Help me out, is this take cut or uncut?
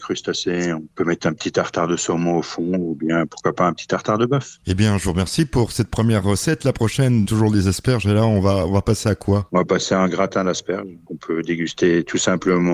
cut